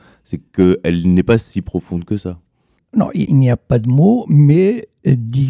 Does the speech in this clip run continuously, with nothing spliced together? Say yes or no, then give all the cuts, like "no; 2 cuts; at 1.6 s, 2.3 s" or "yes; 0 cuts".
no; 1 cut; at 3.2 s